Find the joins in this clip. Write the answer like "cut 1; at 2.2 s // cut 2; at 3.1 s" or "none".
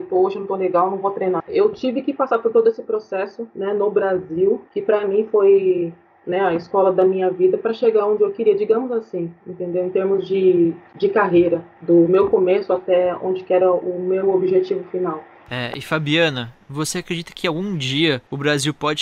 cut 1; at 1.4 s

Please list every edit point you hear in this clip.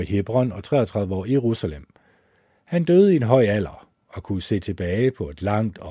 none

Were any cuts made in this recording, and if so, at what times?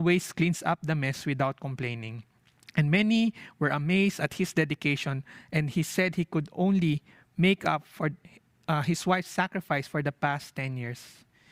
none

